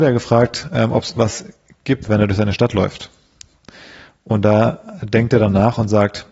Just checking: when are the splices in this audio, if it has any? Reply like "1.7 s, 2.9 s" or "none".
2.1 s